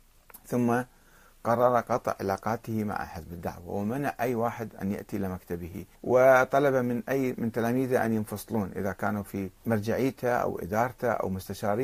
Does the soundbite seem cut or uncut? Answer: cut